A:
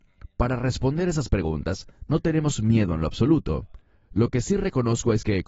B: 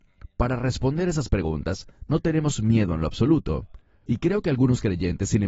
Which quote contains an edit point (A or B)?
B